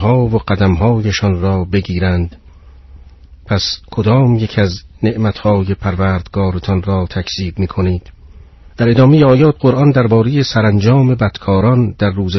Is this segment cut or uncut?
cut